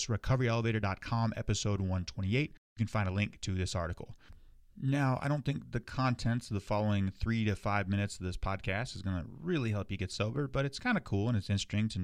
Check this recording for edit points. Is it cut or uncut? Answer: uncut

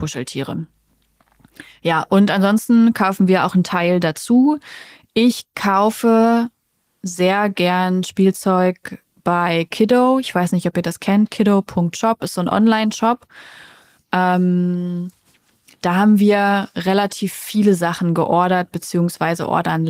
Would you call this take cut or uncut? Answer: uncut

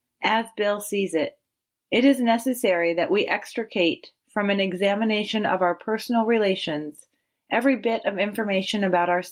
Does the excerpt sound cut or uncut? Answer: cut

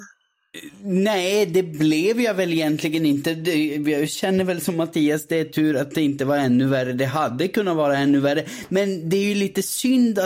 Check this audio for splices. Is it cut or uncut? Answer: uncut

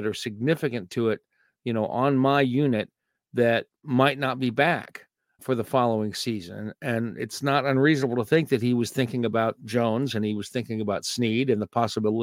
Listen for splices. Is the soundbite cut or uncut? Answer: cut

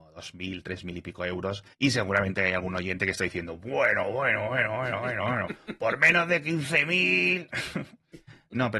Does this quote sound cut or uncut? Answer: cut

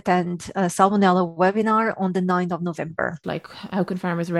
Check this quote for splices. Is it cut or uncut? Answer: cut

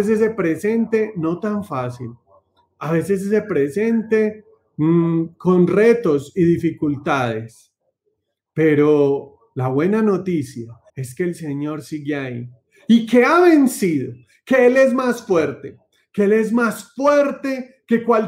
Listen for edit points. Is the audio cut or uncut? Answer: cut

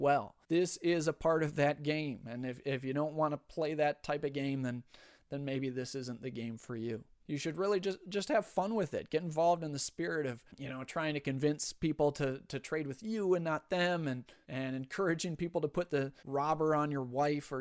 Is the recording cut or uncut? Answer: uncut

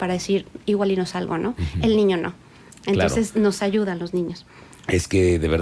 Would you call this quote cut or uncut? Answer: uncut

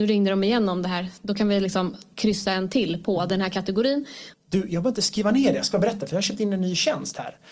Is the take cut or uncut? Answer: cut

